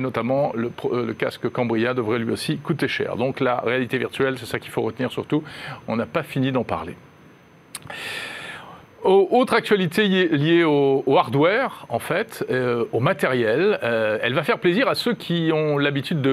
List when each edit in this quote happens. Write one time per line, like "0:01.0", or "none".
none